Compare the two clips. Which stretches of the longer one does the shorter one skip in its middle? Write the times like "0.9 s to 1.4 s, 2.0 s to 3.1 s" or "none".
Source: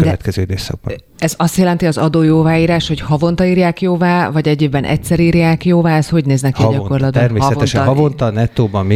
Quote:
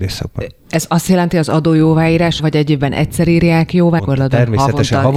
2.9 s to 4.3 s, 5.9 s to 6.8 s